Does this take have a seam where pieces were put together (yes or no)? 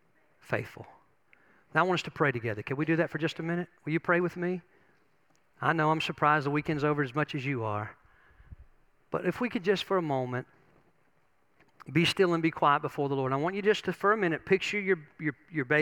no